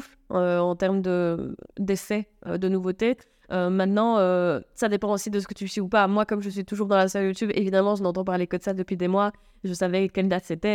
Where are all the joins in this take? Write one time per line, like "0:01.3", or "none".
0:02.5